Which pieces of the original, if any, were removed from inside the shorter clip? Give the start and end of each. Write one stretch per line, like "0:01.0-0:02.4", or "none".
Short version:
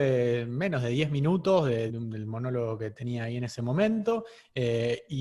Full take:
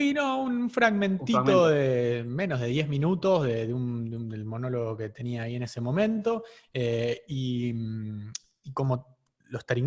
0:03.7-0:04.1

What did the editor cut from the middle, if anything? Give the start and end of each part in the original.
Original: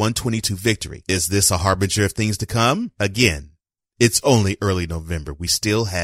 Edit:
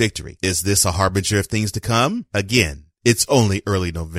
0:03.6-0:03.9

